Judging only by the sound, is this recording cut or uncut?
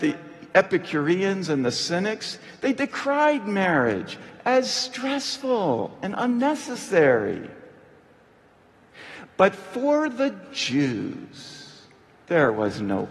uncut